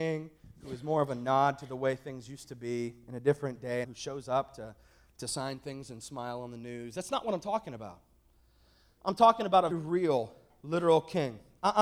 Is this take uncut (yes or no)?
no